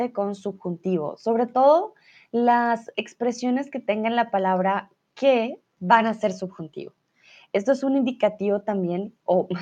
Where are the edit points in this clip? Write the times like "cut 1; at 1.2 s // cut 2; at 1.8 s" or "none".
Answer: none